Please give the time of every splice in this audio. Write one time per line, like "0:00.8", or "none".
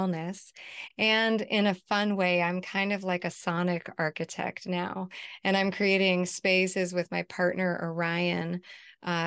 none